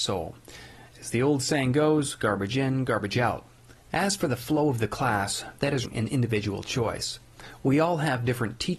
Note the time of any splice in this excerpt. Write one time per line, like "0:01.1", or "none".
0:03.8
0:05.8

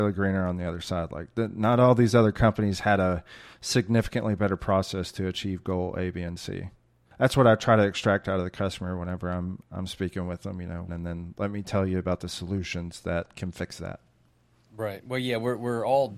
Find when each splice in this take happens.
0:10.9

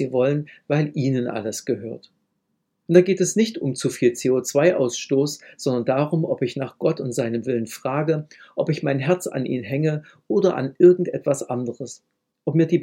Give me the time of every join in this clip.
0:02.9

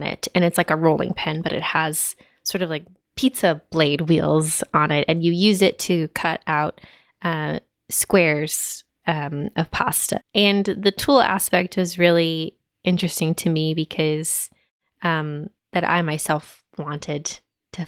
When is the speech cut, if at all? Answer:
0:10.2
0:15.6

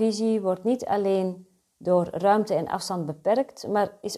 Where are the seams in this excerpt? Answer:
none

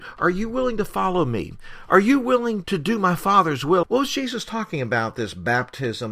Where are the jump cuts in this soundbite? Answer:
0:02.6
0:03.8

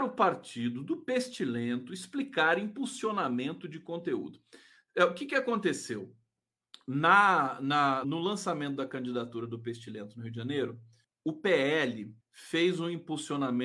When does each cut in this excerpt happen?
0:08.0
0:11.0
0:12.2

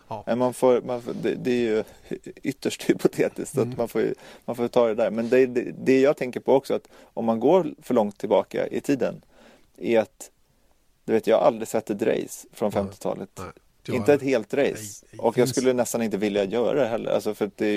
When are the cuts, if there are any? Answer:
0:15.0

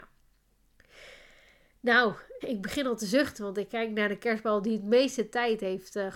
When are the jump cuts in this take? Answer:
0:02.4

